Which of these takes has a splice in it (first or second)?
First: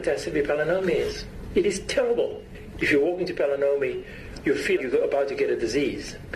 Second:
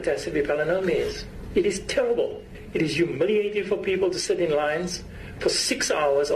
first